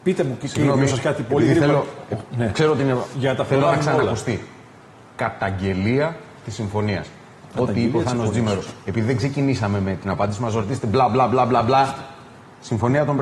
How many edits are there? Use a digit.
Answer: 0